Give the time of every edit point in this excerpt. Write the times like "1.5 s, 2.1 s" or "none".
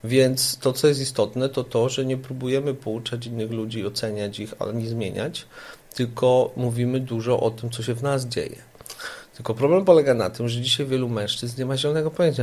none